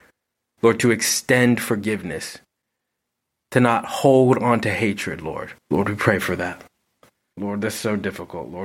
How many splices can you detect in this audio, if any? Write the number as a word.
two